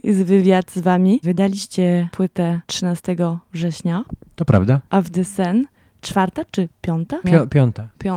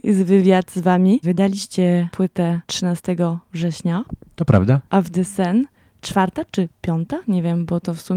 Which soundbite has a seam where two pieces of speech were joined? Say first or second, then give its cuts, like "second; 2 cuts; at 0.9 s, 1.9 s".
first; 1 cut; at 7.2 s